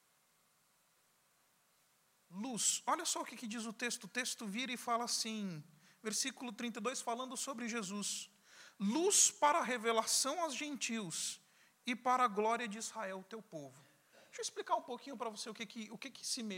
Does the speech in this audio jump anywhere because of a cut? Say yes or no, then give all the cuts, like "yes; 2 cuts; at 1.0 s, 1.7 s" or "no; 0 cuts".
no; 0 cuts